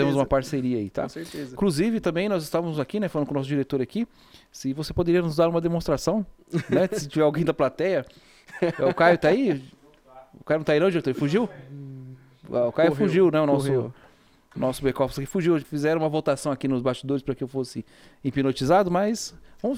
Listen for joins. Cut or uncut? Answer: cut